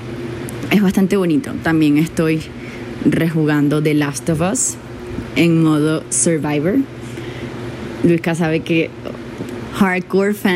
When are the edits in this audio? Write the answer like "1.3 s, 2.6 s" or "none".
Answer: none